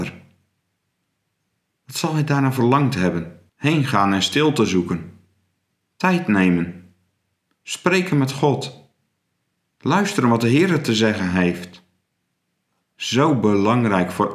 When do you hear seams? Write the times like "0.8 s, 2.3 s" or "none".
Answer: 3.5 s

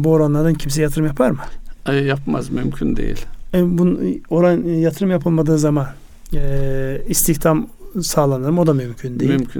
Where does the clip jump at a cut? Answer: none

